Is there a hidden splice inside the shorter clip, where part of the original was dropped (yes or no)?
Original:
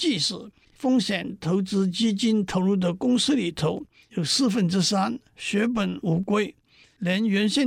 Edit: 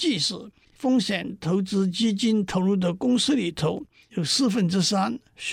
no